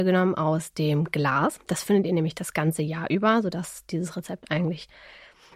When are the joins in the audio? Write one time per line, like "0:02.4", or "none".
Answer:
none